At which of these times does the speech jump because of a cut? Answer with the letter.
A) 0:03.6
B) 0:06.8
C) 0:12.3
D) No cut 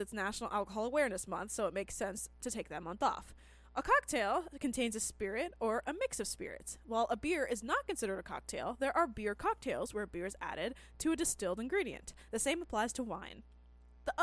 D